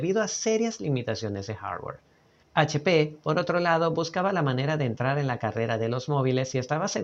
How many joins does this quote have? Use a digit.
0